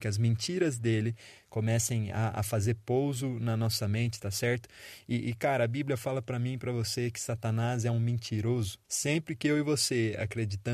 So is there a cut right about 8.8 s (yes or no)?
yes